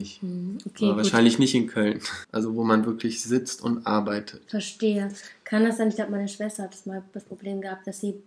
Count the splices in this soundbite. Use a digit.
1